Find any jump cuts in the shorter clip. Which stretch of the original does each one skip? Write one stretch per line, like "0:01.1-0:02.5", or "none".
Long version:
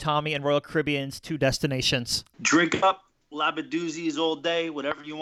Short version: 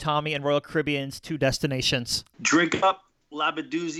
none